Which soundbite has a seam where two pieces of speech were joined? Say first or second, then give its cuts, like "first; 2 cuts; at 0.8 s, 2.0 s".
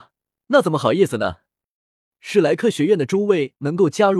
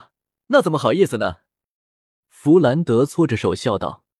first; 1 cut; at 2.1 s